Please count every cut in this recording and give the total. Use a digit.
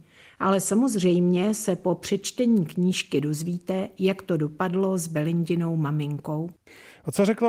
0